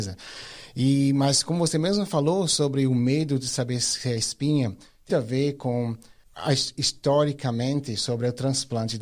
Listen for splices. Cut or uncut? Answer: cut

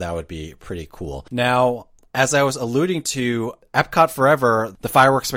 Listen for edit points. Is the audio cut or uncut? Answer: uncut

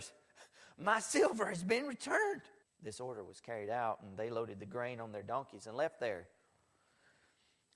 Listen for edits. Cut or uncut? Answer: cut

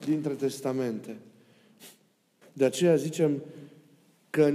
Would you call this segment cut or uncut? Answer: cut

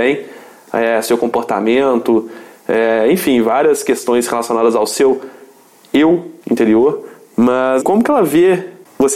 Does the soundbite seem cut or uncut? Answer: cut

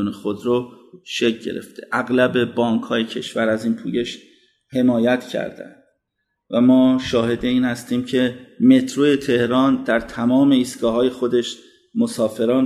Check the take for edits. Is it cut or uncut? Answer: uncut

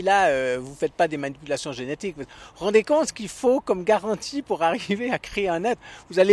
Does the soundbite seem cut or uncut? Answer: uncut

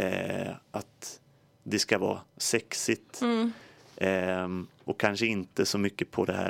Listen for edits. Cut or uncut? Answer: uncut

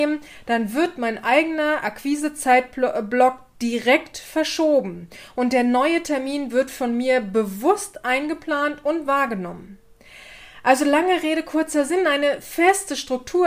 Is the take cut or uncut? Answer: uncut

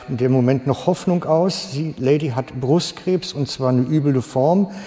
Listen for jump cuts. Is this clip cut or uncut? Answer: uncut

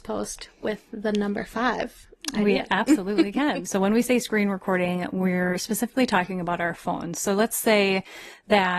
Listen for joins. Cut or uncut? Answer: cut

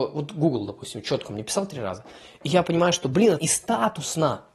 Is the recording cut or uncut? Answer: cut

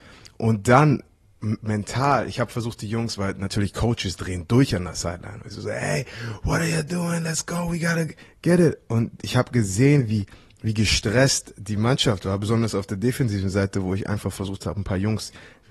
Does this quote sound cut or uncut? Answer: uncut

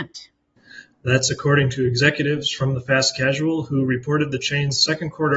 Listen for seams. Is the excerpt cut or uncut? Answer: cut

